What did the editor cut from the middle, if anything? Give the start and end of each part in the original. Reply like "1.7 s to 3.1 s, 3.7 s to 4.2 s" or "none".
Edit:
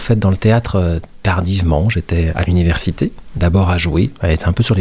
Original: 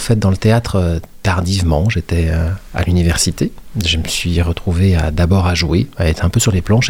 2.3 s to 2.7 s, 3.8 s to 5.1 s